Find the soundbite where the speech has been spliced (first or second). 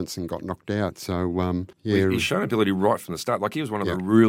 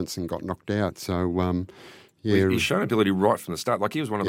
first